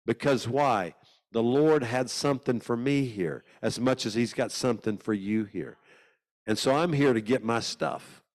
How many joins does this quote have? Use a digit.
0